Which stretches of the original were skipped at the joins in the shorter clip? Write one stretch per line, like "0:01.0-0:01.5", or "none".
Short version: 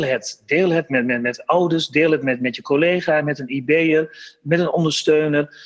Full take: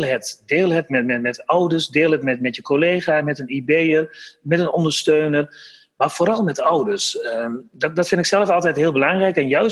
none